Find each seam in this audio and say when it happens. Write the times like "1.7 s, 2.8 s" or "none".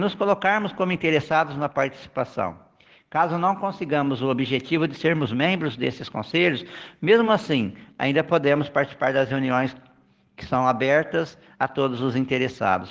none